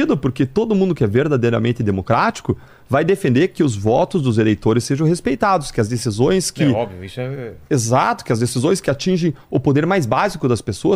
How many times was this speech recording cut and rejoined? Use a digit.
0